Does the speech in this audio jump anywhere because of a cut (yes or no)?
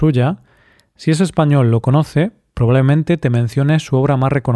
no